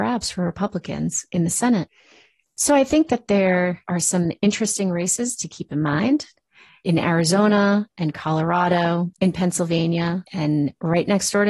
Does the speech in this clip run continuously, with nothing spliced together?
no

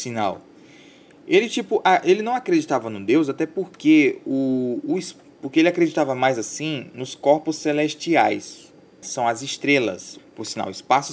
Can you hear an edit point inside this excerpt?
yes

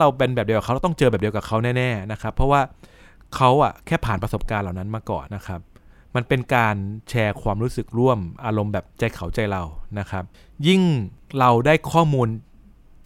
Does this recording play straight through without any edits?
no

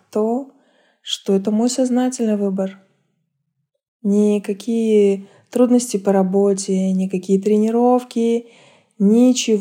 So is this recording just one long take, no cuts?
no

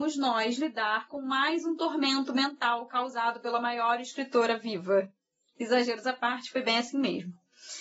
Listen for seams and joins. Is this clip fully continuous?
yes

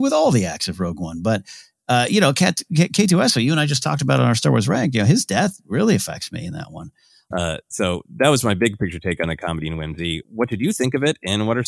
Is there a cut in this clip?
yes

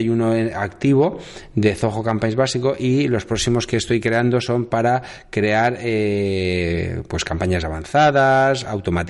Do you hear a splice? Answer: no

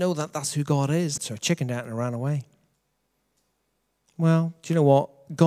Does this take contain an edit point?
yes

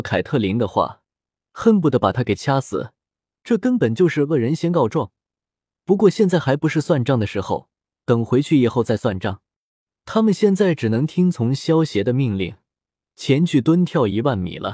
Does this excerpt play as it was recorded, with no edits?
yes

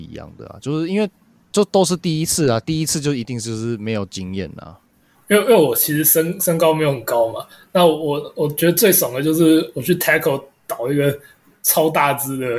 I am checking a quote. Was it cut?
yes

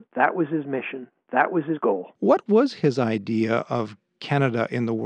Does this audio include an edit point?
yes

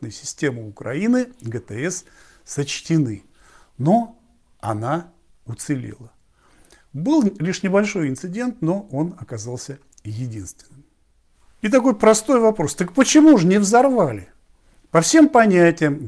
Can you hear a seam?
no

